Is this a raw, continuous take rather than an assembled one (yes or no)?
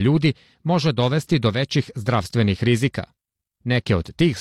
yes